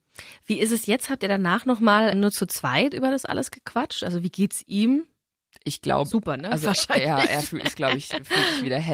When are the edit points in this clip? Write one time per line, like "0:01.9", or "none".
0:02.1